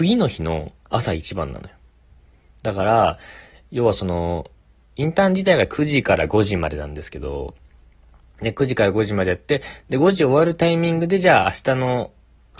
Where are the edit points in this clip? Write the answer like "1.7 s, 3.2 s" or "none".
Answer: none